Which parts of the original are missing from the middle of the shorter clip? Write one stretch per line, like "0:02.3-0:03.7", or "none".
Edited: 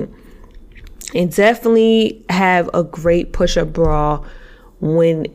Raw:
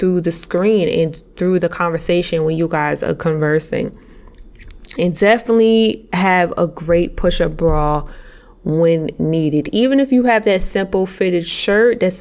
none